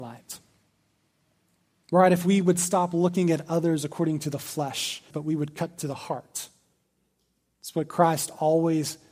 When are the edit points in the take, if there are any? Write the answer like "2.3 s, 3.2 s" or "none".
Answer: 5.1 s